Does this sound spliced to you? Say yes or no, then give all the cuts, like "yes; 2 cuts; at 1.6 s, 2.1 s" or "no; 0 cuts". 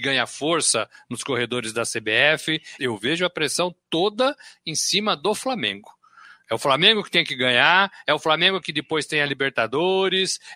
yes; 2 cuts; at 2.8 s, 8.0 s